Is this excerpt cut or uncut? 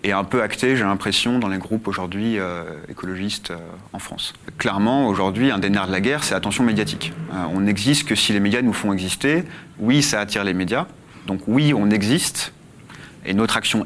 cut